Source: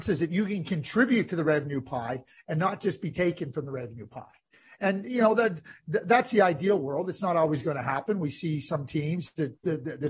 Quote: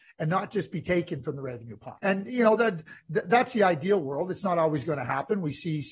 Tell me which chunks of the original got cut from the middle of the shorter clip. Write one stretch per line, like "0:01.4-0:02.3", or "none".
0:04.3-0:04.8